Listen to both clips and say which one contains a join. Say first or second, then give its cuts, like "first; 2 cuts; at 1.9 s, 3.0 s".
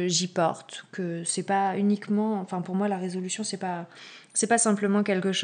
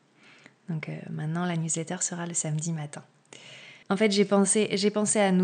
second; 1 cut; at 3.8 s